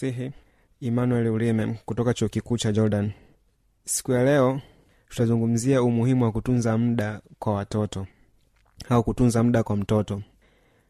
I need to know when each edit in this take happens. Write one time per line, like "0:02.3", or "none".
none